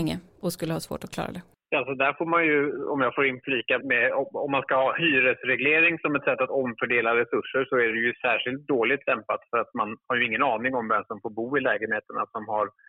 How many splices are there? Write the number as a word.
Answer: one